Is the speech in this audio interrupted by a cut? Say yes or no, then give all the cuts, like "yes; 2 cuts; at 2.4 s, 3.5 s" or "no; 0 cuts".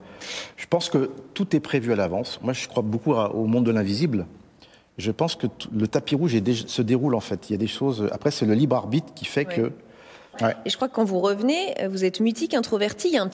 yes; 1 cut; at 10.3 s